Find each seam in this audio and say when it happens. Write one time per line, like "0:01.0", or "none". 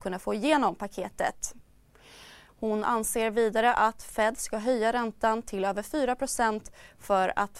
0:02.5

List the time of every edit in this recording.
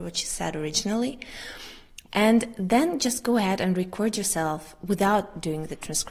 0:02.1

